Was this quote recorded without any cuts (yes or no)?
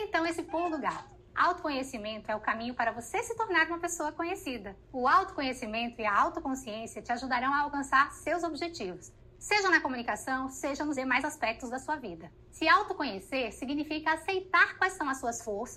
yes